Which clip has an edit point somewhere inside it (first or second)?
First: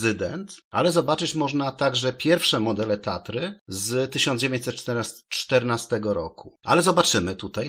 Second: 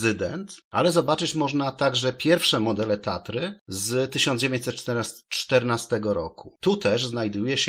first